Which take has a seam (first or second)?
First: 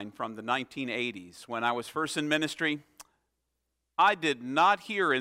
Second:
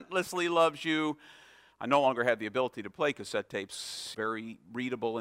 second